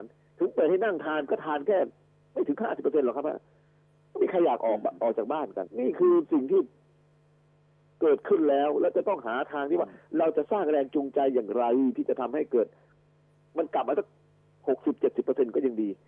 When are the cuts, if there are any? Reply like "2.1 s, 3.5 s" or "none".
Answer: 5.7 s